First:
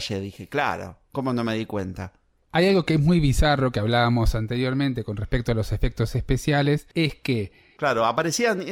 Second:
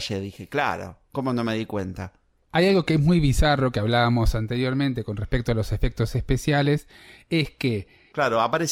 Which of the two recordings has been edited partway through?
first; 1 cut; at 6.9 s

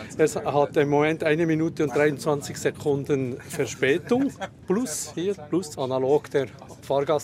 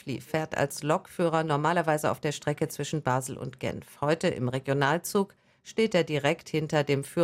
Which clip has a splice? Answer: first; 1 cut; at 5.7 s

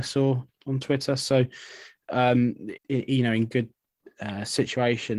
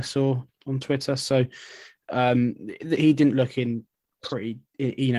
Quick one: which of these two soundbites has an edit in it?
first; 1 cut; at 2.8 s

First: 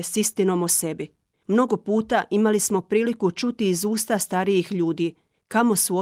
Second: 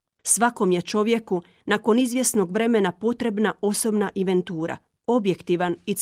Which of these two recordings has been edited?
first; 1 cut; at 1.3 s

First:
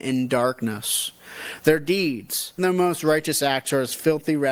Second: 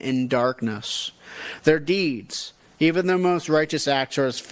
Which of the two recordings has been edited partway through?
first; 1 cut; at 2.6 s

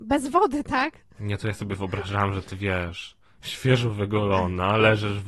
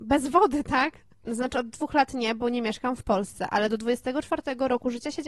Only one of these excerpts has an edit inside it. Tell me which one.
second; 1 cut; at 1.1 s

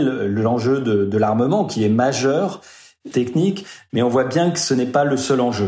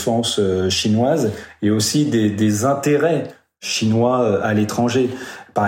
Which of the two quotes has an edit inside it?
first; 1 cut; at 3.1 s

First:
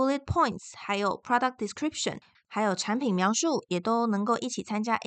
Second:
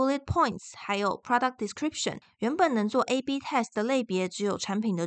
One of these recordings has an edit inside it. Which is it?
first; 1 cut; at 2.3 s

